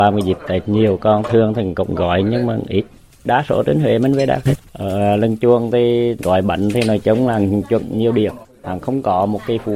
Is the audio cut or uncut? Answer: uncut